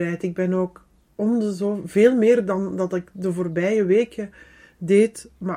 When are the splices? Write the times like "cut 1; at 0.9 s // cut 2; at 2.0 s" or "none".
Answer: none